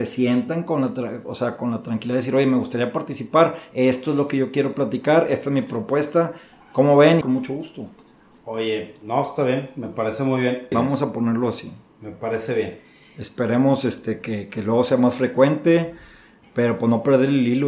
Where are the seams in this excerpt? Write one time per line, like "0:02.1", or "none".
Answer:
0:07.2
0:10.7